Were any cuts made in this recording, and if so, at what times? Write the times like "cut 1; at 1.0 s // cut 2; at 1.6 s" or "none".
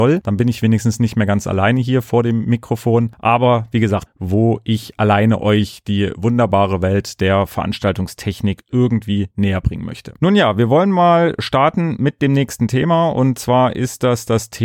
cut 1; at 4.1 s